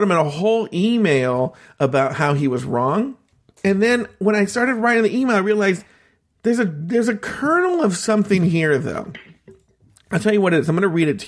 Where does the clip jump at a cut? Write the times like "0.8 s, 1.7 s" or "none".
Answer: none